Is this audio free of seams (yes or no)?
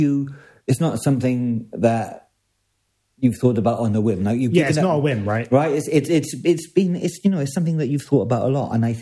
yes